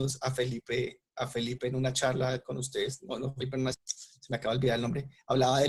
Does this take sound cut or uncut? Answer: cut